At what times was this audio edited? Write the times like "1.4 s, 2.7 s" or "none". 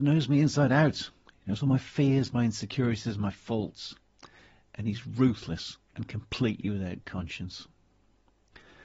5.9 s